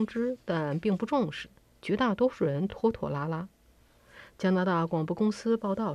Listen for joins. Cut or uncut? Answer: uncut